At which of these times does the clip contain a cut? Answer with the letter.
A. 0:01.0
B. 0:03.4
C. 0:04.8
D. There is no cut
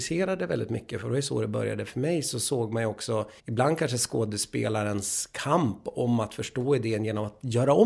B